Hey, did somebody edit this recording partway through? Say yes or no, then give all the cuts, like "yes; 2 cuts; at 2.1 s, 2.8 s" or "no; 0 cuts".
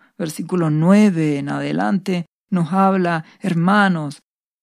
no; 0 cuts